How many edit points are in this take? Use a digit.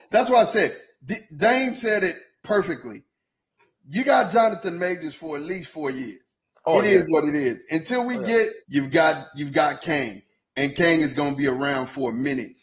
1